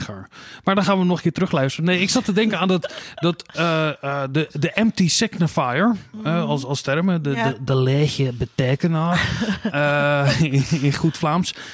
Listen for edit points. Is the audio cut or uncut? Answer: uncut